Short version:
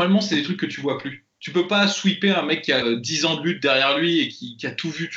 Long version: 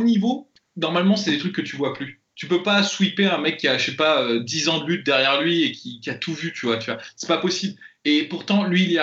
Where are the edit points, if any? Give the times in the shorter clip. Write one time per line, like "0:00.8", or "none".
0:02.8